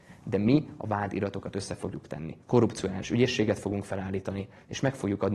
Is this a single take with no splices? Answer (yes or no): no